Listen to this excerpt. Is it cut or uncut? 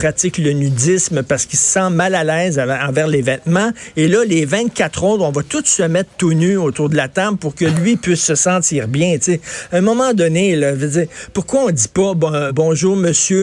cut